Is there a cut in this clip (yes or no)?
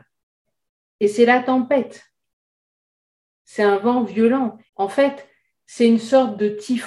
yes